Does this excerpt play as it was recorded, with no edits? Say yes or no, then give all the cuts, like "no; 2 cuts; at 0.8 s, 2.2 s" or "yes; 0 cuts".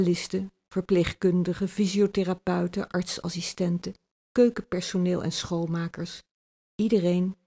yes; 0 cuts